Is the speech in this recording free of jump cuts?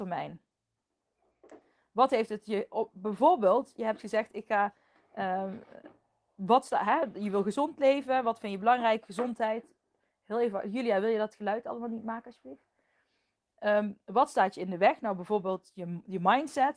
yes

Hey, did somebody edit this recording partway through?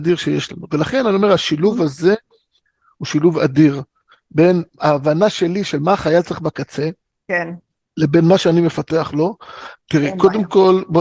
yes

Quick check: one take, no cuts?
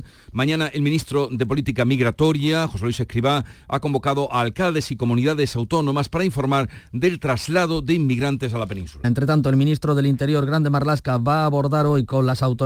no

